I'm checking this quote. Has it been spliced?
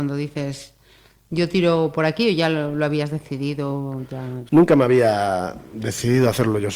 yes; 1 cut; at 4.5 s

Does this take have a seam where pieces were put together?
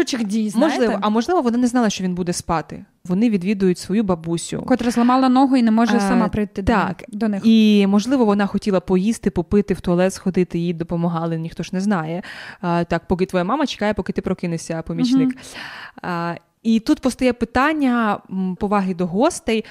yes; 2 cuts; at 3.1 s, 18.6 s

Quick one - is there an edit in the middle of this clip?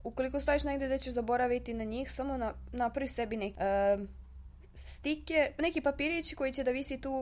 yes; 1 cut; at 3.5 s

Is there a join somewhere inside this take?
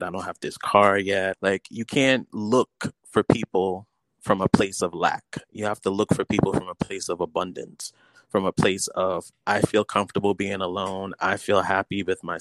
yes; 1 cut; at 1.3 s

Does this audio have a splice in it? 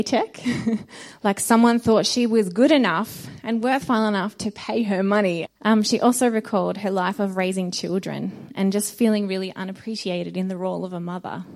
yes; 1 cut; at 5.5 s

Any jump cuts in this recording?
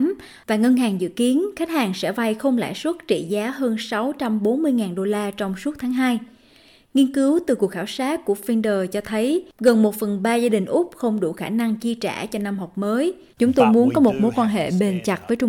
yes; 1 cut; at 13.4 s

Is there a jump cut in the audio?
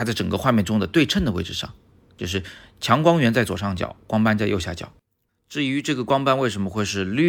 yes; 1 cut; at 5.3 s

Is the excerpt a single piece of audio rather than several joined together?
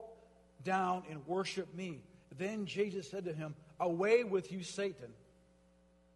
yes; 0 cuts

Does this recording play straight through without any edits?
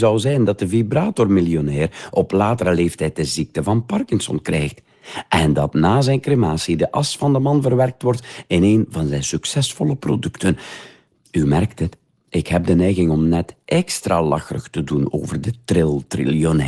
yes; 0 cuts

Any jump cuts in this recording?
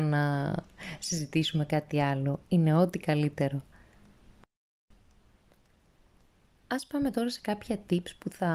no; 0 cuts

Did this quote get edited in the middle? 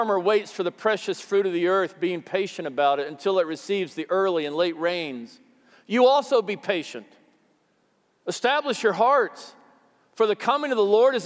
no; 0 cuts

